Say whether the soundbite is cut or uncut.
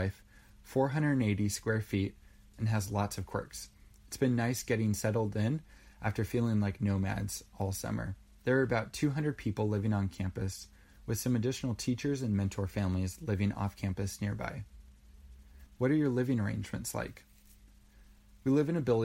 cut